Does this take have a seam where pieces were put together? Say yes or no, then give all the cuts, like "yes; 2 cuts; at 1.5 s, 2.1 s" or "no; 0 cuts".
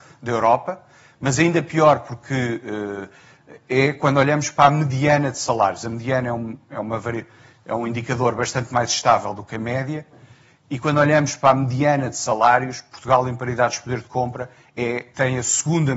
no; 0 cuts